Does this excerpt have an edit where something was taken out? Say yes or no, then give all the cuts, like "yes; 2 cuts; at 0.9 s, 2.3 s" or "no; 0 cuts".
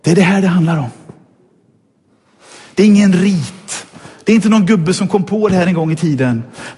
no; 0 cuts